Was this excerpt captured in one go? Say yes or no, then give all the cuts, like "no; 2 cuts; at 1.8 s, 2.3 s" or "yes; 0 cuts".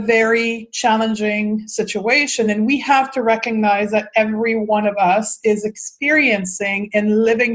yes; 0 cuts